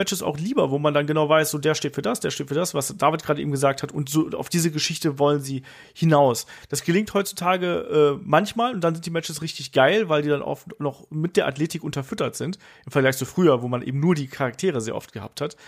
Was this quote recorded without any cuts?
yes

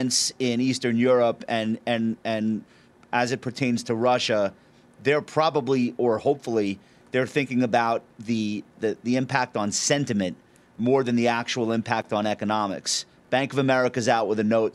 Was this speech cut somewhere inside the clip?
yes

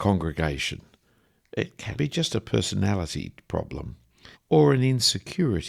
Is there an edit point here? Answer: yes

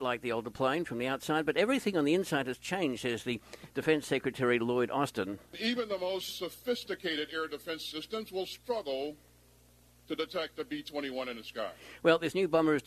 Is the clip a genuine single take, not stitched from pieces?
yes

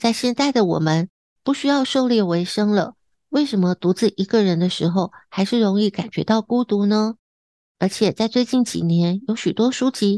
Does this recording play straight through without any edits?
yes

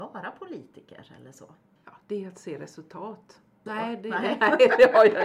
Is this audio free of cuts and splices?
no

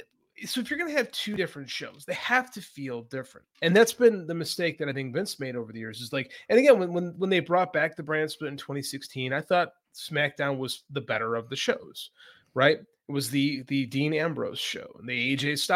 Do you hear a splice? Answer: yes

